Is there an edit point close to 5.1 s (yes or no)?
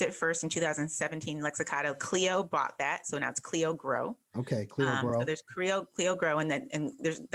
no